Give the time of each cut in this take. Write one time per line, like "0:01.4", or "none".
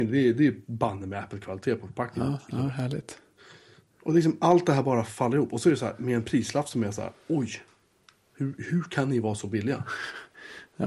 none